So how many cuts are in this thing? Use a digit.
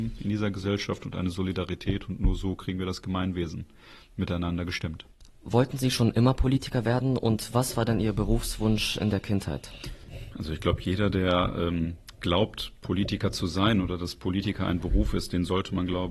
0